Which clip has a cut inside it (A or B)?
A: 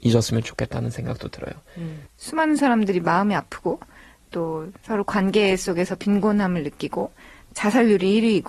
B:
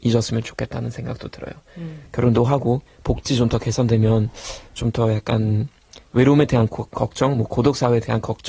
A